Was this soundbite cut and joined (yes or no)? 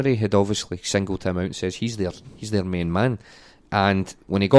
no